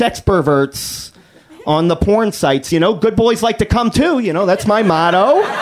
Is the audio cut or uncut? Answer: uncut